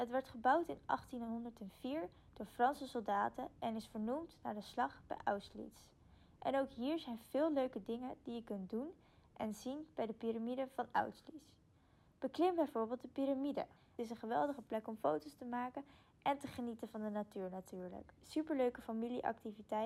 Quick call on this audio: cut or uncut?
cut